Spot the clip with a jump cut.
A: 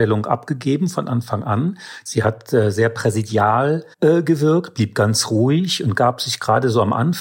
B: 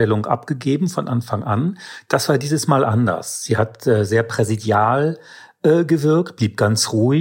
A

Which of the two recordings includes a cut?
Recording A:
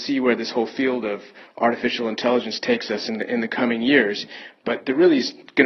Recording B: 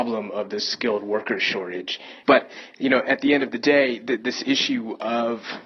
B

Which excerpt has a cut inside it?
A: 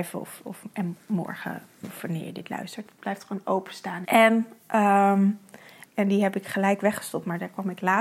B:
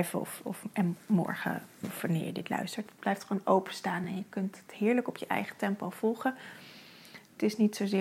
A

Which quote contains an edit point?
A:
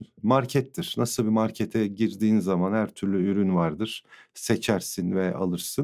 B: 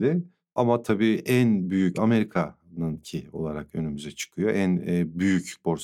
B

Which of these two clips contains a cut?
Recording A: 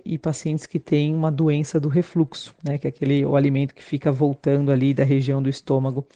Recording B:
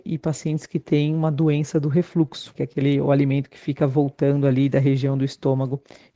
B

